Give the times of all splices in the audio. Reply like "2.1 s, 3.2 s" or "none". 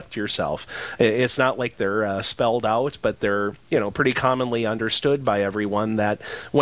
none